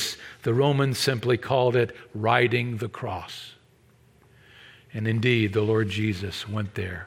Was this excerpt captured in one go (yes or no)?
yes